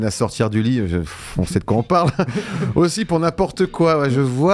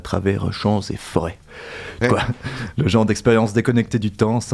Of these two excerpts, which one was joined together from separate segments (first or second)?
second